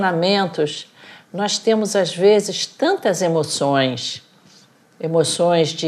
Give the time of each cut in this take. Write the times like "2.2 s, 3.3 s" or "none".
none